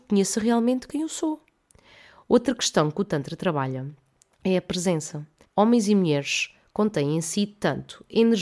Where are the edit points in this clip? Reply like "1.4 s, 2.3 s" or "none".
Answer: 5.4 s